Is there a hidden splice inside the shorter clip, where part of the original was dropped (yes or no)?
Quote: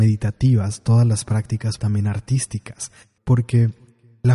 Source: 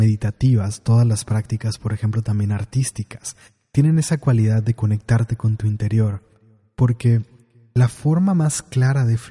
yes